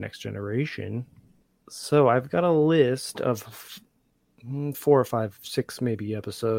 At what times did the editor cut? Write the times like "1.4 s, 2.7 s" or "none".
none